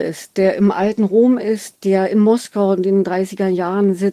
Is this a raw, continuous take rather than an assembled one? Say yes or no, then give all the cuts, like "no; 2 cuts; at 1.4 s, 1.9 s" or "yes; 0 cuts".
no; 1 cut; at 1.7 s